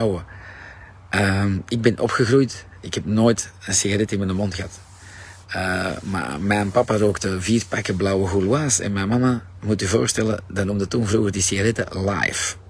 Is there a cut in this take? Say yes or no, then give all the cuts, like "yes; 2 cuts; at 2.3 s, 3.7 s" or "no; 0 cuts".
no; 0 cuts